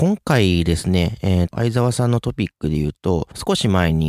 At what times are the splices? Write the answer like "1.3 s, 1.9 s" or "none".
1.5 s